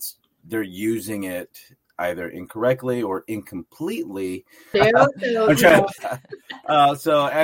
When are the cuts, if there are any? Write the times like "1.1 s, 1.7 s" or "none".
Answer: 4.7 s, 6.0 s